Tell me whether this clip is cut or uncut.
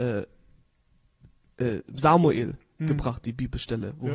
uncut